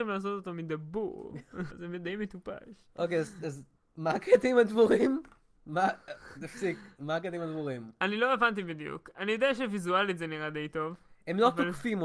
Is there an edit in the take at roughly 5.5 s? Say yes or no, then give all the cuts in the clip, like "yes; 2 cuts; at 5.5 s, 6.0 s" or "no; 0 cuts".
yes; 2 cuts; at 1.7 s, 5.5 s